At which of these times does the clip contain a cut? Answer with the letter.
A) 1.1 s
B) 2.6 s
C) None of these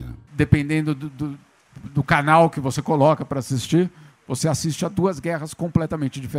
C